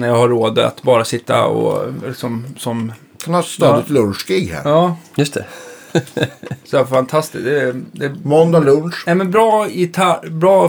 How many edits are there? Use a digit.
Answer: 0